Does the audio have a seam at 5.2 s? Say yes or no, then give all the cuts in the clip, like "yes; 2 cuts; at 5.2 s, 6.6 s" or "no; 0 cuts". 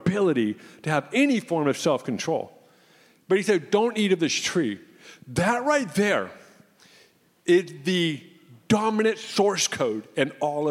no; 0 cuts